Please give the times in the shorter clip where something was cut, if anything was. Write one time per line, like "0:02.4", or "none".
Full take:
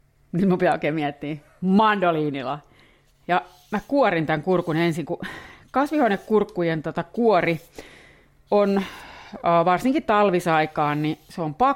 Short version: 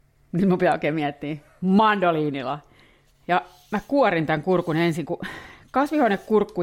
none